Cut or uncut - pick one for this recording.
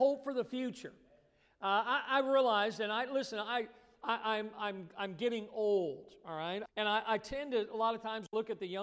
cut